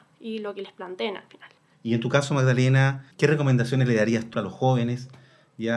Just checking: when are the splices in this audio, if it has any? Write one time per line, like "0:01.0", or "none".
0:01.7
0:03.1
0:04.3